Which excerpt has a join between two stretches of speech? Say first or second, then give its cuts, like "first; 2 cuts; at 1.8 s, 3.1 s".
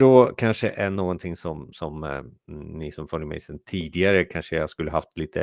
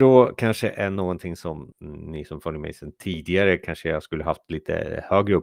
second; 1 cut; at 1.7 s